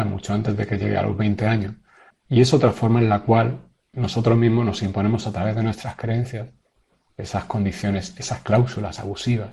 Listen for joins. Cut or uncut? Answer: cut